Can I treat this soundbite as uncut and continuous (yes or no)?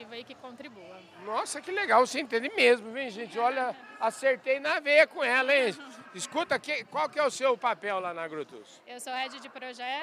yes